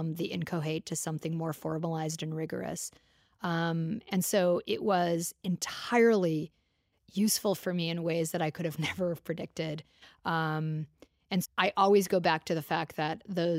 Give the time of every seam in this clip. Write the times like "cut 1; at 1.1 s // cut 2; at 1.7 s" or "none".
cut 1; at 11.4 s